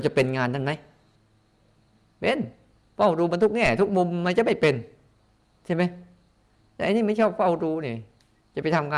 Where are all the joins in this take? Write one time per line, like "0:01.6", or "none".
none